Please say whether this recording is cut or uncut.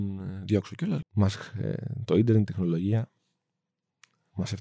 cut